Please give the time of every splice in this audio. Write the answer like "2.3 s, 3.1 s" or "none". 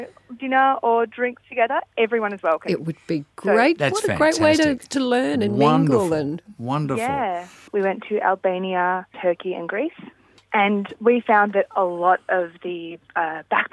7.7 s, 9.1 s